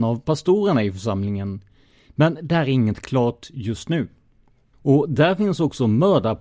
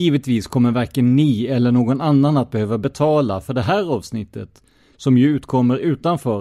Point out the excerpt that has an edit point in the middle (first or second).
first